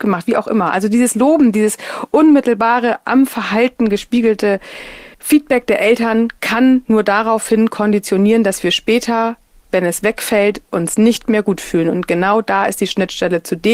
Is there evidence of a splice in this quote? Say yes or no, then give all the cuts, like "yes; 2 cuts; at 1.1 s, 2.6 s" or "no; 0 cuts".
yes; 1 cut; at 5.1 s